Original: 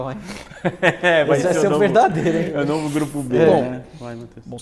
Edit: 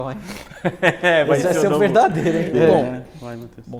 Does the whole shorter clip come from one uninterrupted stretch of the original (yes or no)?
no